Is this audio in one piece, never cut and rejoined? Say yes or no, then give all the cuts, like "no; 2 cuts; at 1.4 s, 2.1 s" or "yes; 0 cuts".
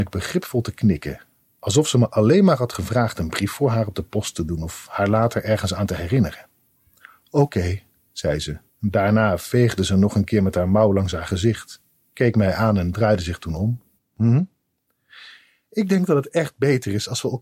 no; 2 cuts; at 8.7 s, 14.0 s